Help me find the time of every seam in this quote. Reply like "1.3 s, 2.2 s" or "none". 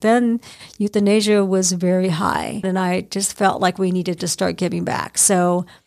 2.6 s